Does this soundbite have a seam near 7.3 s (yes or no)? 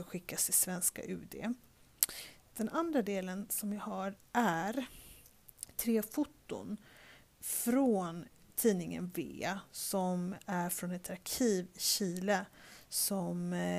no